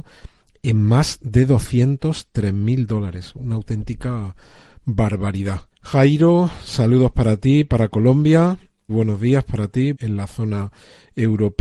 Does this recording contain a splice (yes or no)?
yes